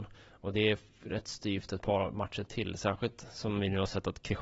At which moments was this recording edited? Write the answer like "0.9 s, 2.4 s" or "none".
none